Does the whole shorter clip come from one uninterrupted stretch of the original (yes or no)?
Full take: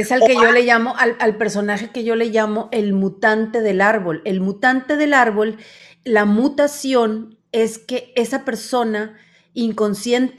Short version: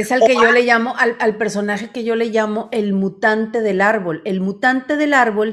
yes